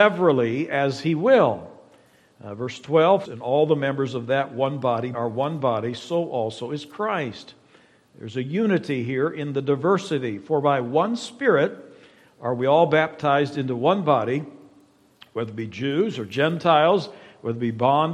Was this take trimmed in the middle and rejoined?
yes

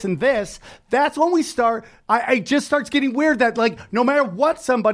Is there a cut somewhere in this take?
no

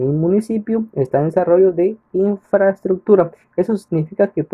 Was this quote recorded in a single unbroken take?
yes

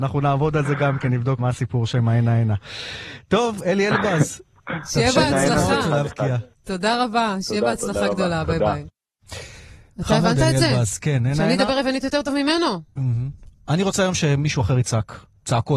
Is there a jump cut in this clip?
yes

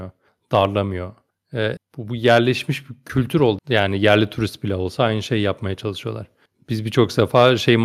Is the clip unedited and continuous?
no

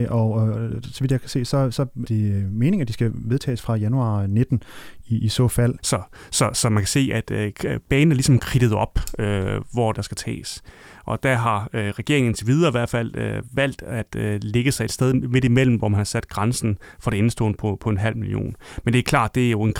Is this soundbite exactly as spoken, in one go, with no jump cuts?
no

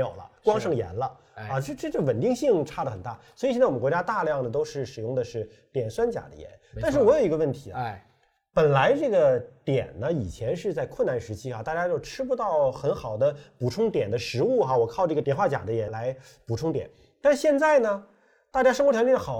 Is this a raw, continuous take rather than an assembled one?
yes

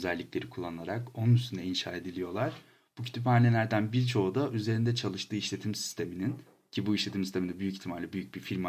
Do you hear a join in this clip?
no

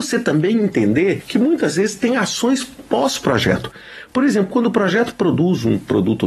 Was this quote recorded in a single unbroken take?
yes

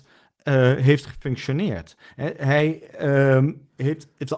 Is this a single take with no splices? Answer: yes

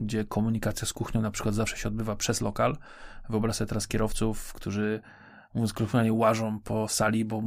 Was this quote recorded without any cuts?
yes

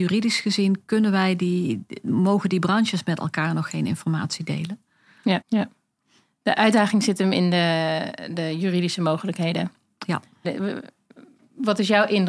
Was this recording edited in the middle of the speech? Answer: yes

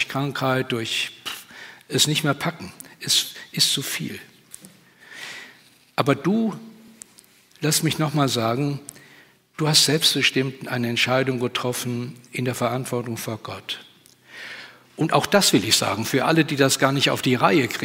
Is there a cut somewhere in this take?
no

